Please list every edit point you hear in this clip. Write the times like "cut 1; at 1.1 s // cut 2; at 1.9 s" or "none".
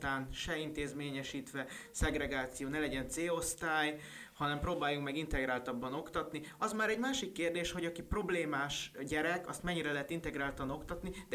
none